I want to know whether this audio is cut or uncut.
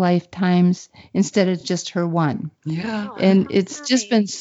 uncut